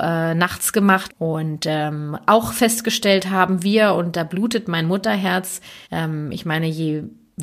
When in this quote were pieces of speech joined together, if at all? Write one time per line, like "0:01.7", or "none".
0:01.1
0:05.8